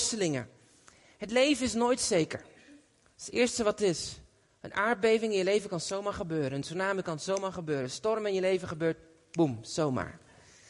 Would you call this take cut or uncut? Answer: uncut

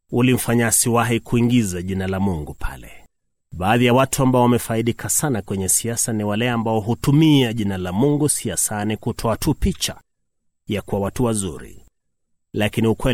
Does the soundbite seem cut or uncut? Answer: cut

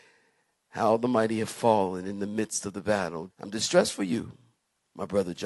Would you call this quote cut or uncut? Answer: cut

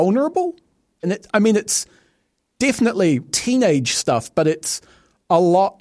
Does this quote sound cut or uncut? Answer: cut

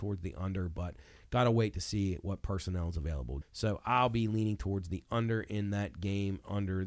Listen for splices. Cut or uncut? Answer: cut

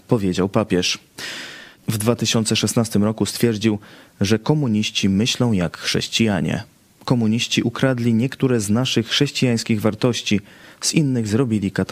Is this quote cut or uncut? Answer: cut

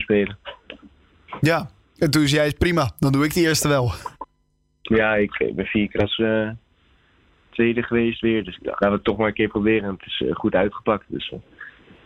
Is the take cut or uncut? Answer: cut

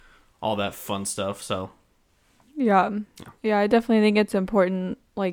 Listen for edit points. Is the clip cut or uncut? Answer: uncut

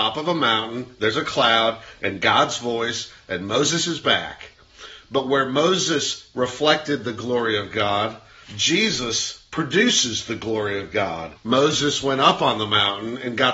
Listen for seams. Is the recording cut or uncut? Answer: cut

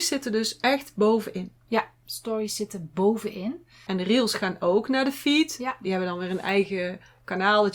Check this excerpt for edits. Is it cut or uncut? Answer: cut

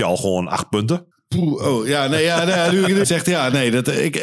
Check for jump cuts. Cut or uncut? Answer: cut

